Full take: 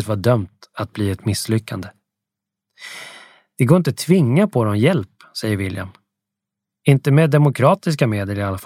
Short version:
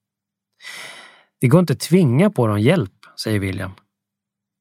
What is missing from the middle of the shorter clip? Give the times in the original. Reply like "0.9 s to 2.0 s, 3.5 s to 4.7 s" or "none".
none